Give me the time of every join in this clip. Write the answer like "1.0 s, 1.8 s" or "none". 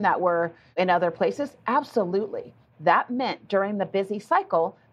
2.7 s